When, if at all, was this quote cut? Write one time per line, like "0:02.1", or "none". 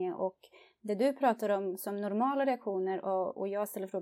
none

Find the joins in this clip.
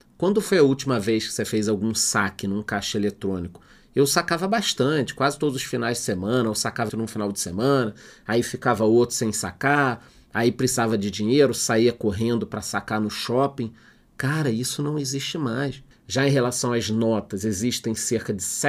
0:06.9
0:15.9

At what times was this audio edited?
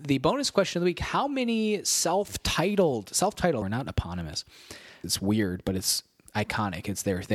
0:03.6
0:05.0

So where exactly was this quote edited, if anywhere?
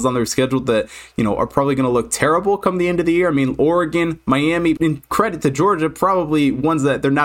0:04.8

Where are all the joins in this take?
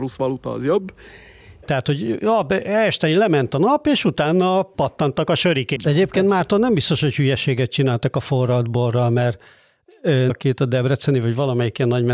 0:01.6
0:05.8
0:10.3

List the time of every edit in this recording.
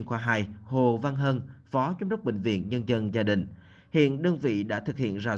none

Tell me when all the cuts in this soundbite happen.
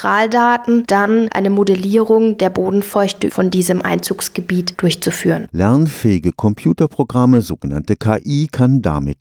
0:05.5

